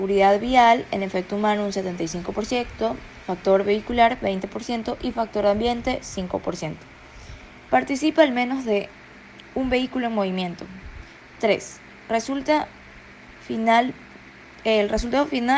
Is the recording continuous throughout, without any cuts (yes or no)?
no